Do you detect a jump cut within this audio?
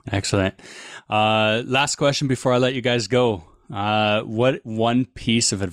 no; 0 cuts

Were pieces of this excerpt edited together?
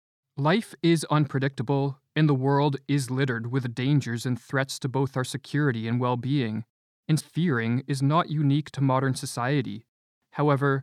yes; 1 cut; at 7.2 s

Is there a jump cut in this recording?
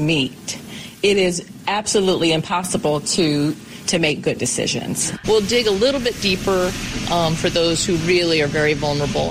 yes; 1 cut; at 5.2 s

